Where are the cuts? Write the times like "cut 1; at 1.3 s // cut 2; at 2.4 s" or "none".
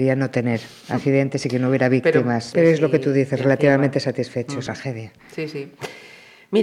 cut 1; at 2.5 s // cut 2; at 4.7 s